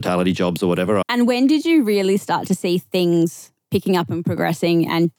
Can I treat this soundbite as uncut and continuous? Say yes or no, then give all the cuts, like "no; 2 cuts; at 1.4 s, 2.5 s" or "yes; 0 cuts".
no; 1 cut; at 1.0 s